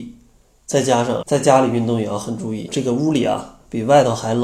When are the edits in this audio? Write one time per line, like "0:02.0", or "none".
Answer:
0:01.2
0:02.7